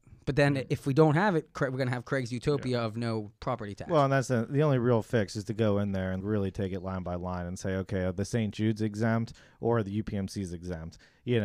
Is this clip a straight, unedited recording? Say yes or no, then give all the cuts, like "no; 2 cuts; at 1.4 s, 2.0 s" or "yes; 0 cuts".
no; 1 cut; at 6.2 s